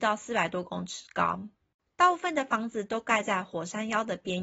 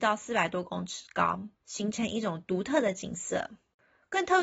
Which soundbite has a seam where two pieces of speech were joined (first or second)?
second